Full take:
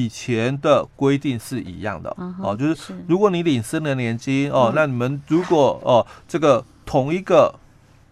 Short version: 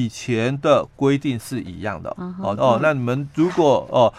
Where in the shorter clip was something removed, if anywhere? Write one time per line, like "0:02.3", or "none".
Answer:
0:02.6